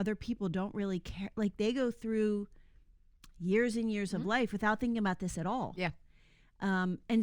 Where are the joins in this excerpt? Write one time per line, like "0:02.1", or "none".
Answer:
none